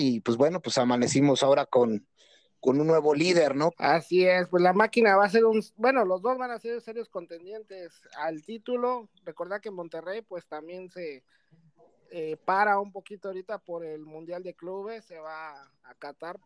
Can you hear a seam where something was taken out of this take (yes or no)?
yes